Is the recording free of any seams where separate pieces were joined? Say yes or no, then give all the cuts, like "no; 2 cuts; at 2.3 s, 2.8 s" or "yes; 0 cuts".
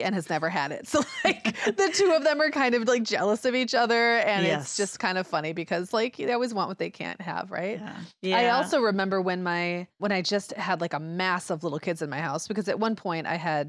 no; 1 cut; at 10.0 s